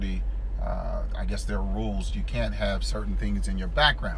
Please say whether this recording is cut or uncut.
uncut